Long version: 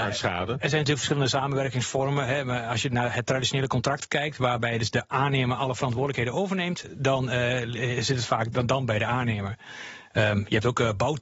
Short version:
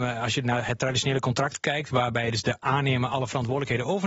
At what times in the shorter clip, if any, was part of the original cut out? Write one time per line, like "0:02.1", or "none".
none